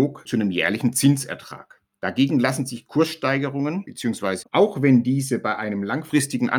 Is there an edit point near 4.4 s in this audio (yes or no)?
yes